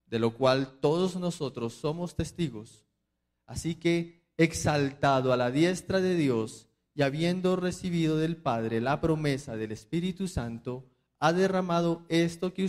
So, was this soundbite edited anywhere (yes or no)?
no